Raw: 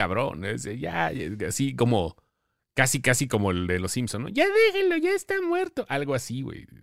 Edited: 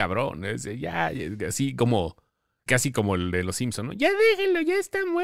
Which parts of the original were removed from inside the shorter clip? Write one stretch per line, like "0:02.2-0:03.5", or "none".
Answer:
0:02.7-0:03.0